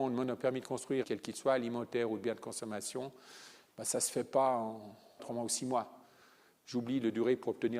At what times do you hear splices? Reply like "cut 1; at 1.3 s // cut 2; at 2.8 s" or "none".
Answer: cut 1; at 1.0 s // cut 2; at 5.2 s